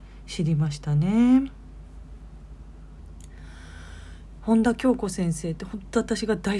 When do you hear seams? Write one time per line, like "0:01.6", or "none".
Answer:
0:04.4